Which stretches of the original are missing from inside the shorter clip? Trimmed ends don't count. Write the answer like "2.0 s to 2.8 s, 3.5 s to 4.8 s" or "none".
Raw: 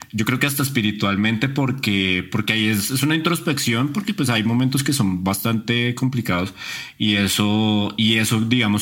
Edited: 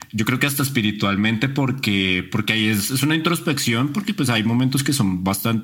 none